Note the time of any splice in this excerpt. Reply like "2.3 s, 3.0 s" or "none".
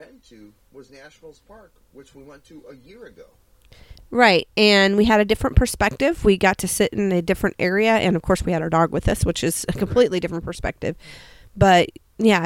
none